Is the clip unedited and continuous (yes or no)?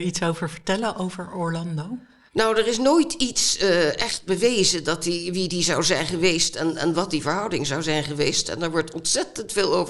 yes